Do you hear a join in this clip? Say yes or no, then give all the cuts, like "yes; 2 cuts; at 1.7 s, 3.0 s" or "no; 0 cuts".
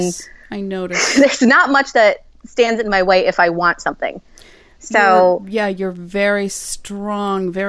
no; 0 cuts